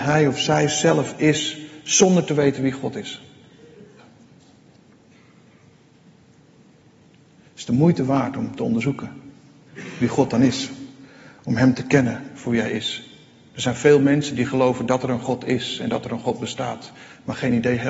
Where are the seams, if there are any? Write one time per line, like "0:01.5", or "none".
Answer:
0:04.0